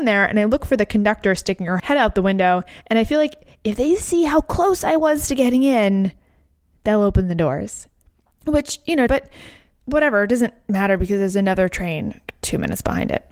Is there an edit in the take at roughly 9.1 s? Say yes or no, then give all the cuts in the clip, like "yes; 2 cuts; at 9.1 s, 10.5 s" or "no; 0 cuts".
yes; 1 cut; at 9.1 s